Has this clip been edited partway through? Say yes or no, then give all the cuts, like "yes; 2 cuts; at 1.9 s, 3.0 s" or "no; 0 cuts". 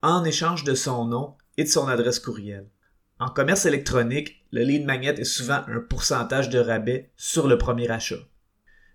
no; 0 cuts